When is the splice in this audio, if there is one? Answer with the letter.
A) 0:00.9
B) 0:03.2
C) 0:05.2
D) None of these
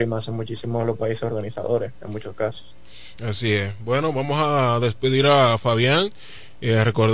B